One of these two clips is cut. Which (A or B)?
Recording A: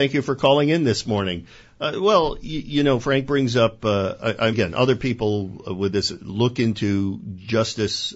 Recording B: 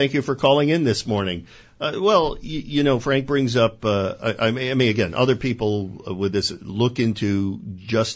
A